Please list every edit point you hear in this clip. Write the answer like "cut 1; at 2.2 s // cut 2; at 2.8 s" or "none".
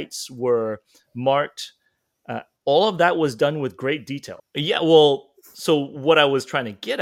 cut 1; at 4.4 s